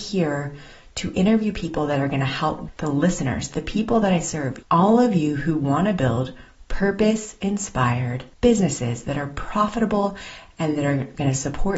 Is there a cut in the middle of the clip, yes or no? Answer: yes